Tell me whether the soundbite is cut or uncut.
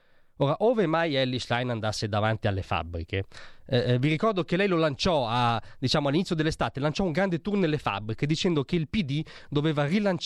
uncut